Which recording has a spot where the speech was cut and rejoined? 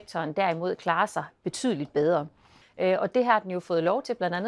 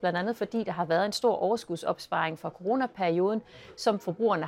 first; 1 cut; at 2.6 s

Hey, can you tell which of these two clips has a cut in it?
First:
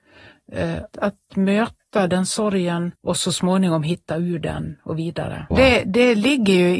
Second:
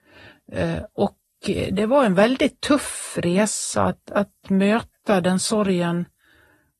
first; 3 cuts; at 0.9 s, 3.0 s, 5.5 s

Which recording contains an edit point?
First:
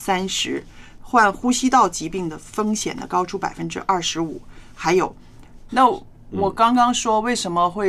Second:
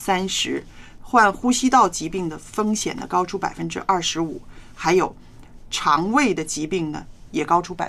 first; 1 cut; at 5.7 s

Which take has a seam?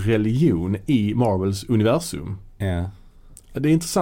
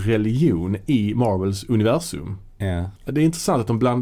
second; 1 cut; at 3.0 s

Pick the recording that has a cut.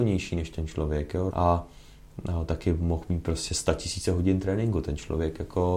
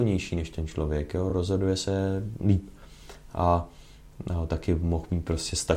first; 1 cut; at 1.3 s

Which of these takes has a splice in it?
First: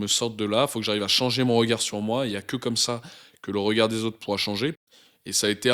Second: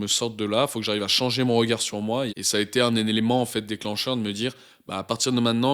second; 1 cut; at 2.3 s

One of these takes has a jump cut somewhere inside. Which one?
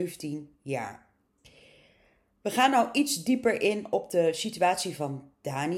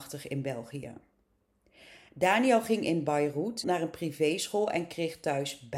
second; 1 cut; at 3.6 s

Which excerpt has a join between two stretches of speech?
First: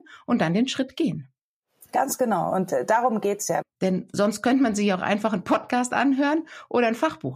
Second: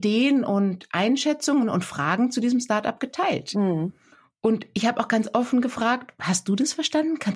first; 1 cut; at 3.6 s

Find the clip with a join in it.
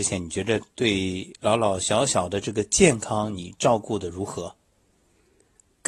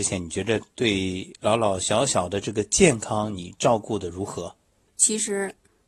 second; 1 cut; at 4.9 s

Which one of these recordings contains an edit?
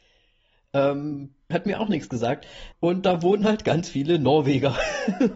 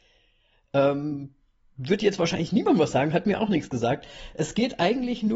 first; 2 cuts; at 1.5 s, 2.7 s

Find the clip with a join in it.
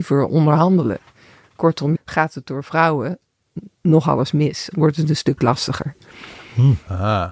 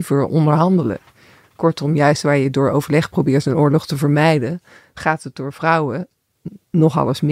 first; 2 cuts; at 1.9 s, 4.7 s

